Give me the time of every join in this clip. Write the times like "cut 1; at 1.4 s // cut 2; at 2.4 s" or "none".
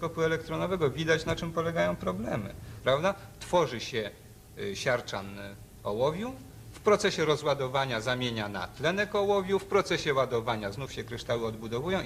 cut 1; at 2.8 s